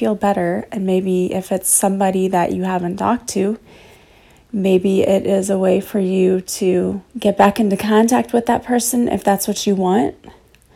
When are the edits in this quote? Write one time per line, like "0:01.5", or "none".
0:07.1